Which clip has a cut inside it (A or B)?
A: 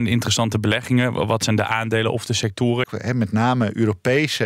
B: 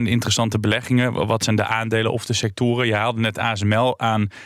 A